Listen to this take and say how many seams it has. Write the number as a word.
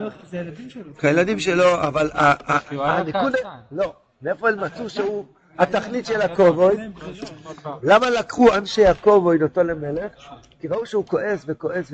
zero